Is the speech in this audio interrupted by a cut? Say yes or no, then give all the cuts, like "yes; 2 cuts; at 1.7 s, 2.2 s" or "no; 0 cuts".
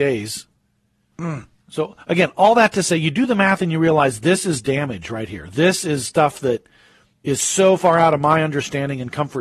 yes; 1 cut; at 1.1 s